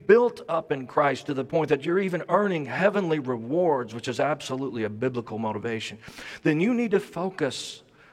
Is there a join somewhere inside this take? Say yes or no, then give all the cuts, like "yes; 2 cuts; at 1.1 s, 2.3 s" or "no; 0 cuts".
no; 0 cuts